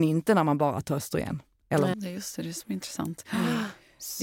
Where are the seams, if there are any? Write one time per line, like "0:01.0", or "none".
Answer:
0:01.9